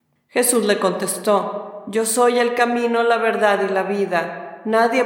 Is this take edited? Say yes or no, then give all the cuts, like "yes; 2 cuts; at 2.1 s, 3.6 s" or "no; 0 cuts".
no; 0 cuts